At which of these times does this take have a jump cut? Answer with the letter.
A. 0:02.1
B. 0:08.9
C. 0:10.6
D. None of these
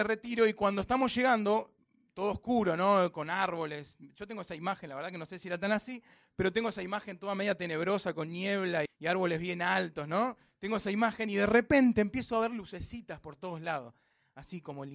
B